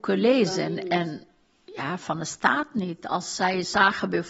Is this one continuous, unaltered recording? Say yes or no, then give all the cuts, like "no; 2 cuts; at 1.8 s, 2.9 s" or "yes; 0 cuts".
no; 1 cut; at 2.0 s